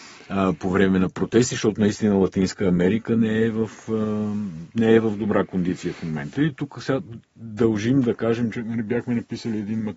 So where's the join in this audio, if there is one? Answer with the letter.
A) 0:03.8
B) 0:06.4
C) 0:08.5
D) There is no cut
B